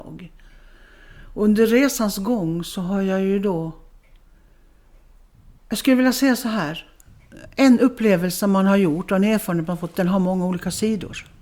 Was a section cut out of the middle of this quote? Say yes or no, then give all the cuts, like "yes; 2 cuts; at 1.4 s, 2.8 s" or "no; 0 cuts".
yes; 1 cut; at 5.6 s